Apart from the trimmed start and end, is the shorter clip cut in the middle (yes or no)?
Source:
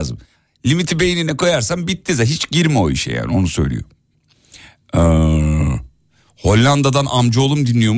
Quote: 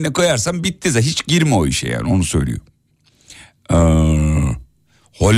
no